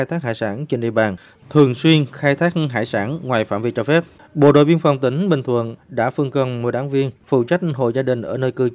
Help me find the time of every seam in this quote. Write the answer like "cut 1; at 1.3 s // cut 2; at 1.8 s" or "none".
cut 1; at 4.2 s